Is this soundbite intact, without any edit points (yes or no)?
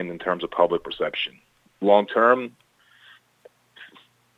yes